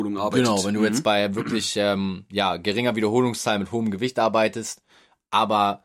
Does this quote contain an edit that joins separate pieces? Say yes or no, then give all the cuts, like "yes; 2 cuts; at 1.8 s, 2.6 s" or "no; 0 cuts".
no; 0 cuts